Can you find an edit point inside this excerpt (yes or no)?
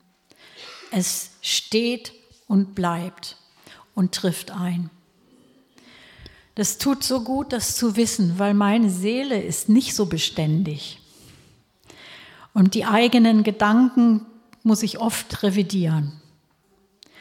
no